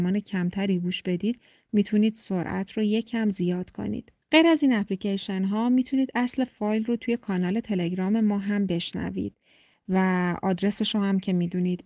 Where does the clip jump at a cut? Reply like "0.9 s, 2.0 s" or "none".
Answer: 4.2 s